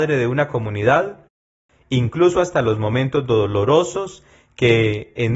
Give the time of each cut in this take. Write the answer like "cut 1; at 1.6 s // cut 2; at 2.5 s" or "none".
cut 1; at 1.7 s